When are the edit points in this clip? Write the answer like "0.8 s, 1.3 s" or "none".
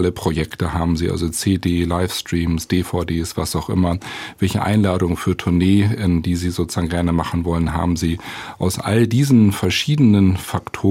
none